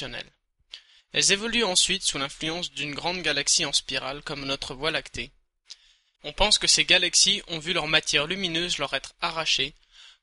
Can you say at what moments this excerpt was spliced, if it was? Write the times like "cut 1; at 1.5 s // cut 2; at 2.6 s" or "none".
cut 1; at 1.0 s // cut 2; at 6.1 s